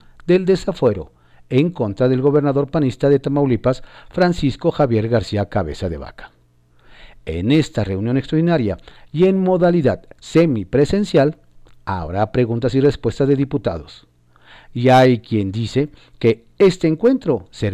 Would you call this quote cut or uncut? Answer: uncut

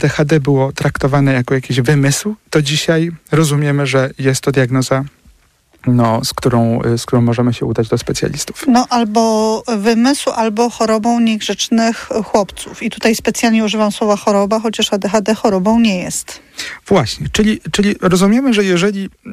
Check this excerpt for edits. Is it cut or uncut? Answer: uncut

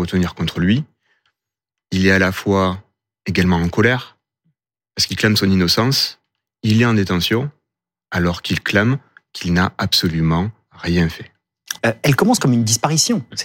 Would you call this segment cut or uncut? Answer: cut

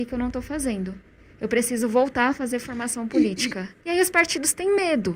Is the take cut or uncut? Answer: cut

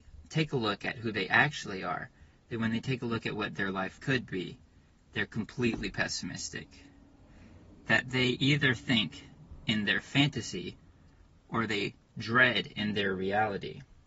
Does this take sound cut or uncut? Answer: cut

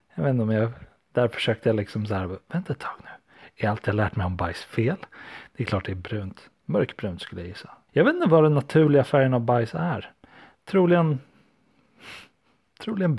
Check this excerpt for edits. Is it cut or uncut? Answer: cut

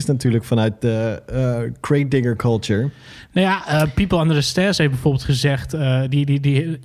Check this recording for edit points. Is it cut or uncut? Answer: uncut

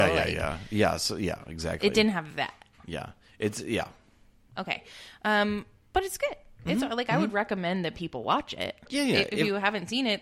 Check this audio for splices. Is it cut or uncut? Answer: uncut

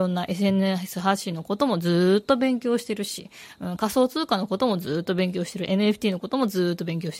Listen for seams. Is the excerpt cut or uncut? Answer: uncut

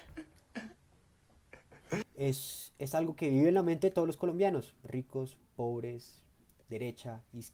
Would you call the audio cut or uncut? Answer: cut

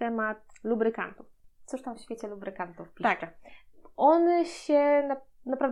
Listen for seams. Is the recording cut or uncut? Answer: uncut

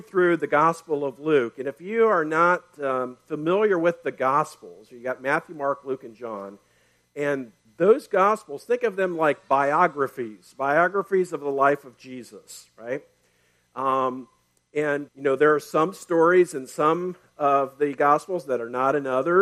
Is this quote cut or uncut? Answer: cut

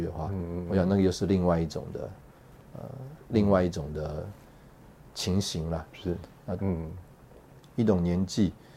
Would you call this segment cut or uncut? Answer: cut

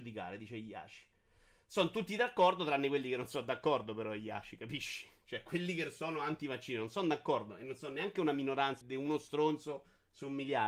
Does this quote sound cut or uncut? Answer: cut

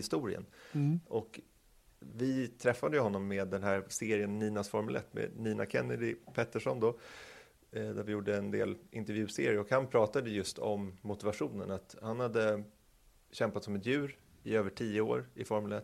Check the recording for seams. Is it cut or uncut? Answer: uncut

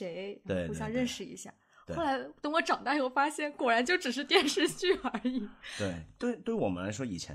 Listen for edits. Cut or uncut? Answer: uncut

